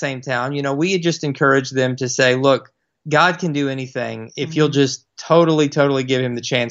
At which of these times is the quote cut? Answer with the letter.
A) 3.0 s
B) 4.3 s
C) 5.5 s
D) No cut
A